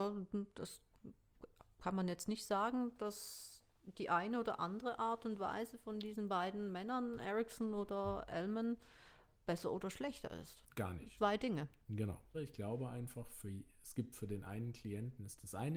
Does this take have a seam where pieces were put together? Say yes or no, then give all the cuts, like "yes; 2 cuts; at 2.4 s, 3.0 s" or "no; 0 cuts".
yes; 2 cuts; at 11.2 s, 12.3 s